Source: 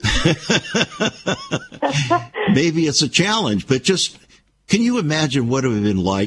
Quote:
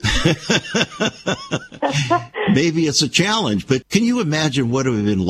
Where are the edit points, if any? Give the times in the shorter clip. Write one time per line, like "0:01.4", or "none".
0:03.8